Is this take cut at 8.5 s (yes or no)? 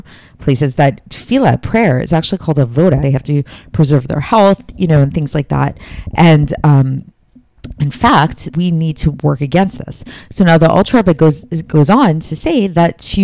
yes